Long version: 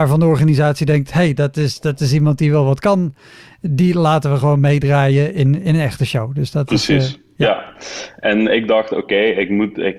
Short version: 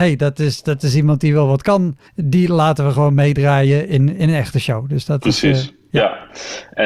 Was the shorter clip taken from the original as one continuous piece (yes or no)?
no